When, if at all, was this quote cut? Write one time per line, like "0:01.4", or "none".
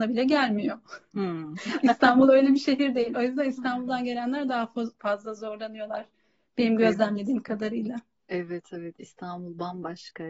none